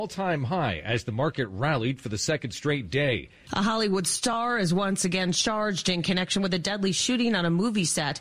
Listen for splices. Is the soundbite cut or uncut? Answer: cut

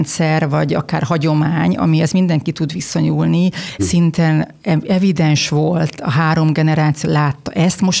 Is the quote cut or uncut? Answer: cut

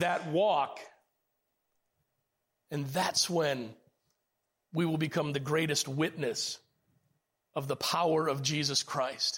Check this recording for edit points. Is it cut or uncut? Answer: uncut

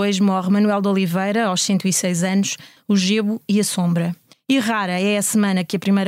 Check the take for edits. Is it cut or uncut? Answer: cut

